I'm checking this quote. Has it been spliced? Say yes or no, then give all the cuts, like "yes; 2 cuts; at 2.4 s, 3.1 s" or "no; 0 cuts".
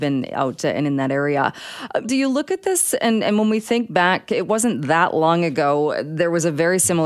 yes; 1 cut; at 2.0 s